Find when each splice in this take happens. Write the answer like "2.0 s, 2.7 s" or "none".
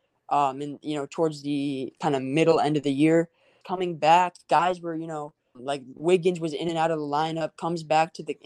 3.6 s, 5.5 s